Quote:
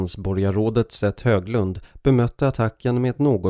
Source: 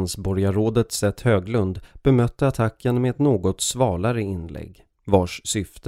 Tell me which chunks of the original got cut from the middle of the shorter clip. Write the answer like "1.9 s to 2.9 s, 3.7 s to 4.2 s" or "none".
none